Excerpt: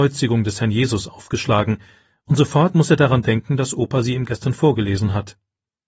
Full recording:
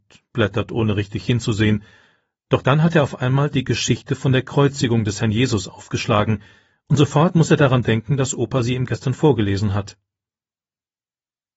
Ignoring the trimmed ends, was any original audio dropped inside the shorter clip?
no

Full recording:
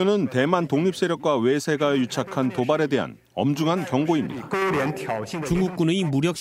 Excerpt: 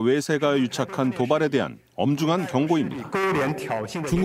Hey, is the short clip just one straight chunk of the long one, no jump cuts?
yes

